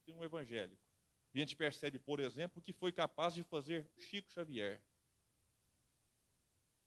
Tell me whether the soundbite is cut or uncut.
cut